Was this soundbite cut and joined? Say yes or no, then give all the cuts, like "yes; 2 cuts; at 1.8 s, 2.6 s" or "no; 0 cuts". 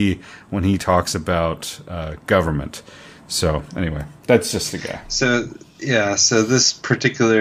no; 0 cuts